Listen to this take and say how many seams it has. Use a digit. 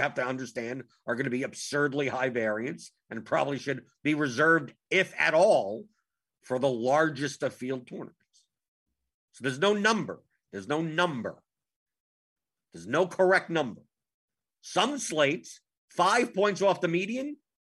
1